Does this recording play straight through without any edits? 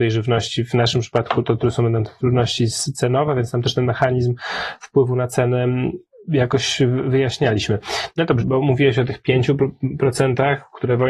no; 1 cut; at 8.4 s

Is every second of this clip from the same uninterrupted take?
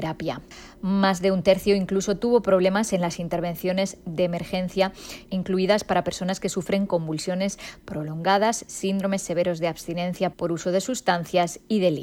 no; 1 cut; at 5.3 s

